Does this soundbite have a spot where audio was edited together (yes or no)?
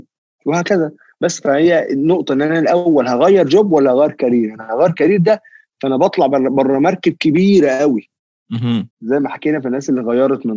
yes